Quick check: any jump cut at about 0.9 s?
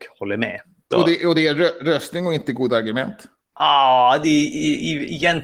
yes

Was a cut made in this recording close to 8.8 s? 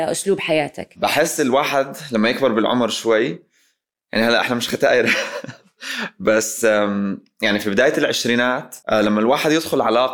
yes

